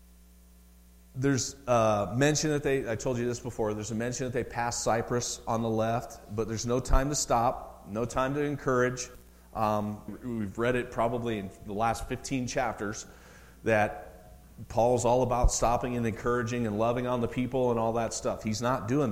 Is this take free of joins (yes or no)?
no